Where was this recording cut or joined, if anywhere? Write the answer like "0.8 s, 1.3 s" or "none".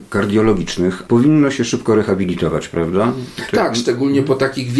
1.0 s